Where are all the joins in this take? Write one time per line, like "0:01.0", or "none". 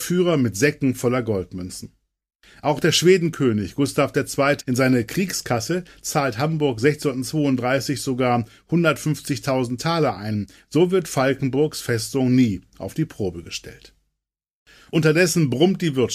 0:04.6